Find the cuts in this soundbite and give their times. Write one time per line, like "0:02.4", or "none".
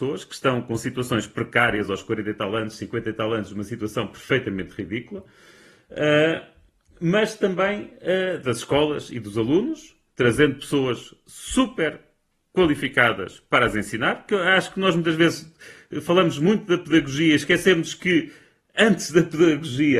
none